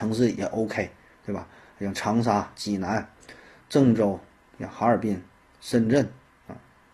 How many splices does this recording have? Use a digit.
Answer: 0